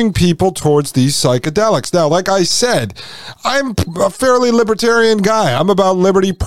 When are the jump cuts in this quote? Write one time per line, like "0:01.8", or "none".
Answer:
none